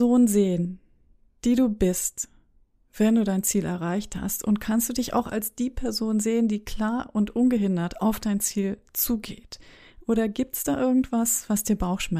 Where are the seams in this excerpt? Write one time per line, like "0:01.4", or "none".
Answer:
none